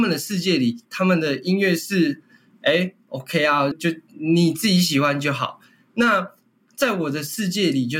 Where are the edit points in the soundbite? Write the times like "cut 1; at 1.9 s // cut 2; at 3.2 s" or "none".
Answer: cut 1; at 3.7 s